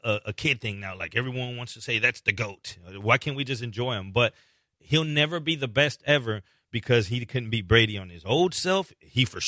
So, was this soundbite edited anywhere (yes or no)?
no